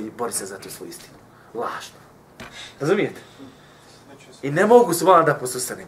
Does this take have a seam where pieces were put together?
no; 0 cuts

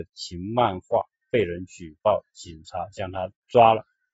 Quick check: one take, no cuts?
yes; 0 cuts

